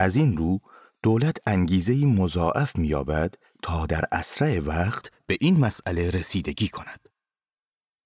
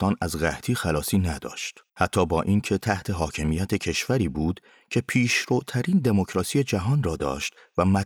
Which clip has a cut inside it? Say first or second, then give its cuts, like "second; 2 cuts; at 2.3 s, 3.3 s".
second; 1 cut; at 1.9 s